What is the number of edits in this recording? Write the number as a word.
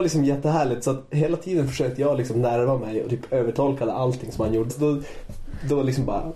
one